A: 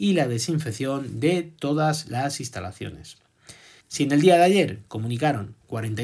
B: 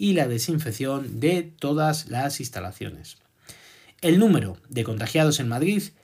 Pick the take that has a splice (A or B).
A